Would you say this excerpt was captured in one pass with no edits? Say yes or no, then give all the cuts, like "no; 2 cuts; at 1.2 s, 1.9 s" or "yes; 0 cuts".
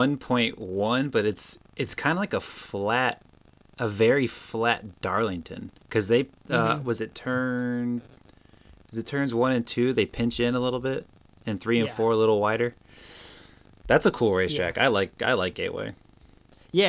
yes; 0 cuts